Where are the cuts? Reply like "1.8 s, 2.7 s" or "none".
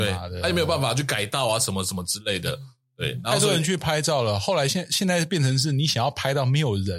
none